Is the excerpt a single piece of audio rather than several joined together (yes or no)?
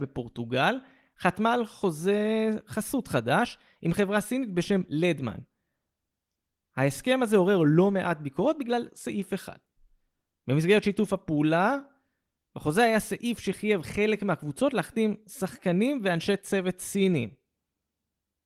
yes